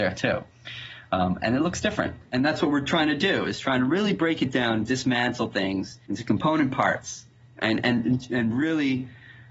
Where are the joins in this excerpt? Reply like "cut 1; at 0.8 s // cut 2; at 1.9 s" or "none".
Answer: cut 1; at 2.2 s // cut 2; at 6.0 s